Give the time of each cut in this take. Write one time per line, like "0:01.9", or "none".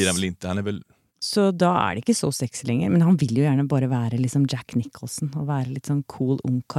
0:01.1